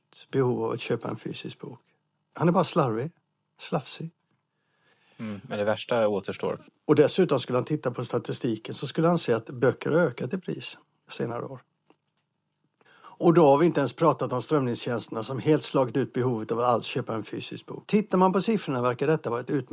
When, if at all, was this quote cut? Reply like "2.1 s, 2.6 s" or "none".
6.7 s, 12.8 s, 17.9 s